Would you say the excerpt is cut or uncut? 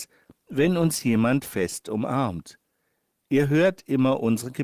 uncut